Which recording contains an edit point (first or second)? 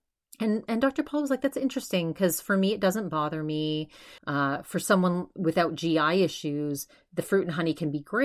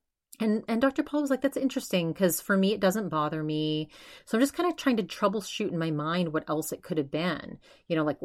first